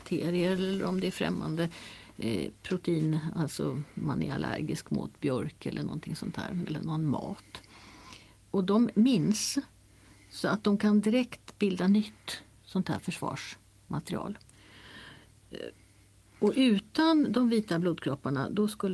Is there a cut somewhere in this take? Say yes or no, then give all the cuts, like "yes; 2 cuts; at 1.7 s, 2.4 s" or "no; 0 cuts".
no; 0 cuts